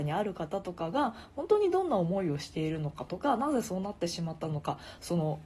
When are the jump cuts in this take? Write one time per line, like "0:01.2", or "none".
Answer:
none